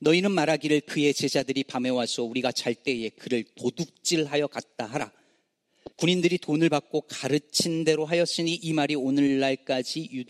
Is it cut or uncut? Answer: cut